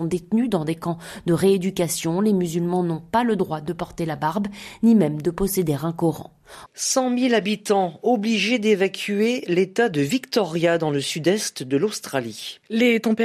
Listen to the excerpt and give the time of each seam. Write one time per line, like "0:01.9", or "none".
0:06.7

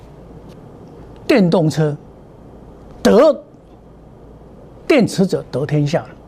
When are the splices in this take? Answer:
none

